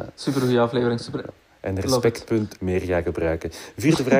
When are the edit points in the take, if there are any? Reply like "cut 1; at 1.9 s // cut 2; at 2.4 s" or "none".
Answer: cut 1; at 1.3 s // cut 2; at 2.5 s